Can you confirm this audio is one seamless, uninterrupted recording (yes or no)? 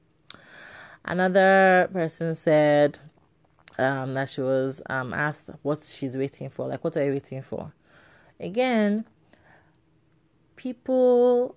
yes